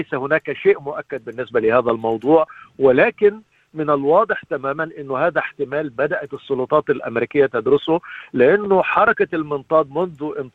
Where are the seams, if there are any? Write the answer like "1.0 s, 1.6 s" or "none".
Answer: none